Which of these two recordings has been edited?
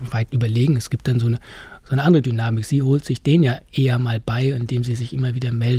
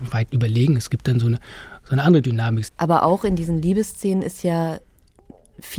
second; 1 cut; at 2.7 s

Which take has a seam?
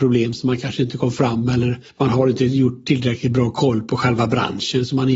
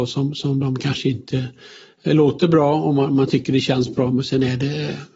first; 1 cut; at 1.9 s

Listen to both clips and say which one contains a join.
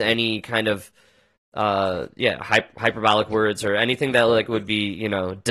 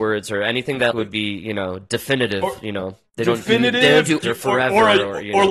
second; 2 cuts; at 0.9 s, 4.2 s

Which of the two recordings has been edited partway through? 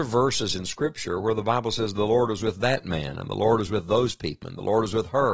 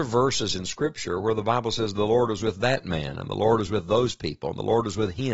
first; 1 cut; at 4.4 s

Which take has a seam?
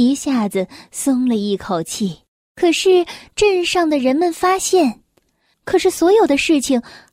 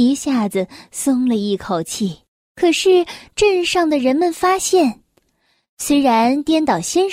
first; 1 cut; at 5.5 s

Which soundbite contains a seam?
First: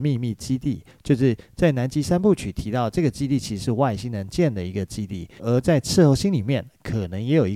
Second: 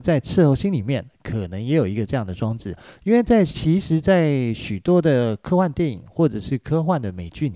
first; 1 cut; at 5.4 s

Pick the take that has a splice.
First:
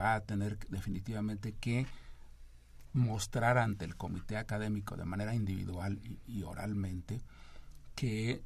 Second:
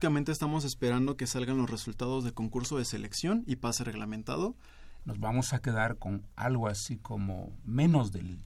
second; 1 cut; at 5.0 s

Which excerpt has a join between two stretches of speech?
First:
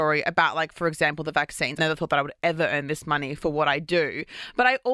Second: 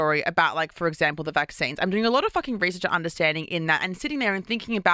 first; 1 cut; at 1.8 s

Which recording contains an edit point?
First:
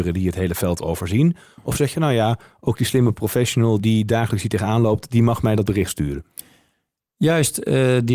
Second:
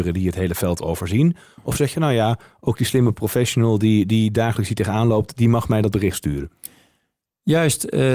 first; 1 cut; at 3.8 s

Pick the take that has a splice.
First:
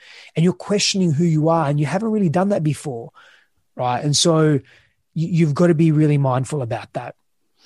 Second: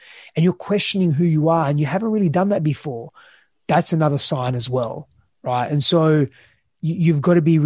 first; 1 cut; at 3.6 s

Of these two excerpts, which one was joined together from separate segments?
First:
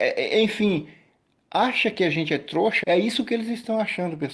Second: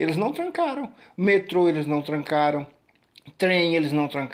first; 1 cut; at 2.8 s

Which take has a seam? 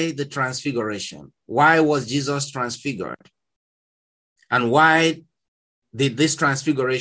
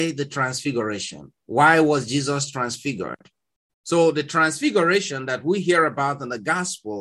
second; 1 cut; at 3.7 s

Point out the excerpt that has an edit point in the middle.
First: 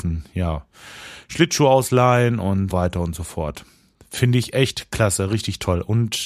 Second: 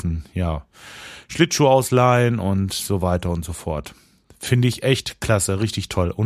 first; 1 cut; at 2.7 s

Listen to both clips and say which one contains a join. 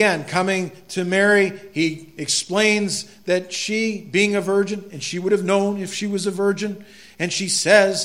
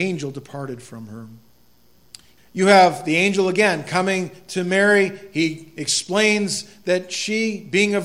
second; 1 cut; at 2.4 s

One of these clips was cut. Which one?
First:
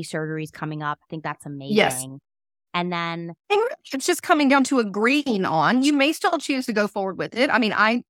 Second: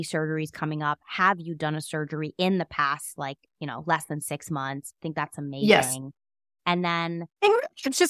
first; 1 cut; at 1.0 s

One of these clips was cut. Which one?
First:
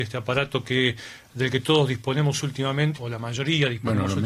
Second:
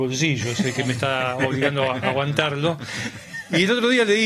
first; 1 cut; at 3.0 s

